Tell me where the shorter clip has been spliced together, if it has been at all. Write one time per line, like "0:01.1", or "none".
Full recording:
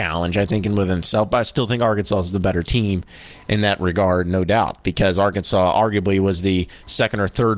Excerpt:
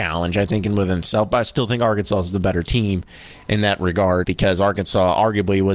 0:04.2